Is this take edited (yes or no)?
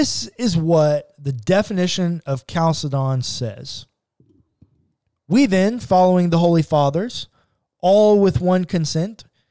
no